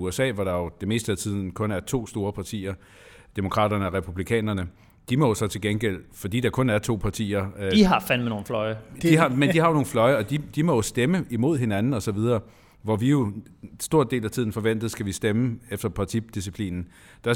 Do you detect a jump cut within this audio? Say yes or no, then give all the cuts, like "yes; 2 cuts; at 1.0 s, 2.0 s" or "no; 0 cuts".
no; 0 cuts